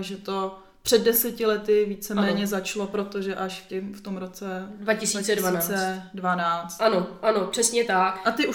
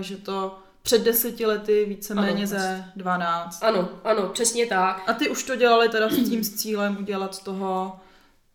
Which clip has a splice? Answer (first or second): second